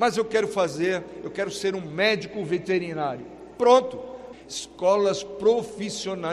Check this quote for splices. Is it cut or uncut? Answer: cut